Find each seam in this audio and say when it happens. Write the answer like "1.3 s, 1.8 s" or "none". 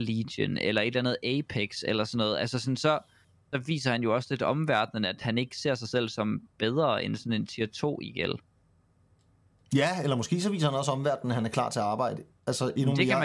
none